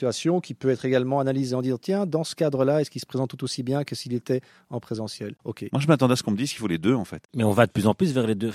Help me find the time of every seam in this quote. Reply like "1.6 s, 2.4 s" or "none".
5.4 s, 7.3 s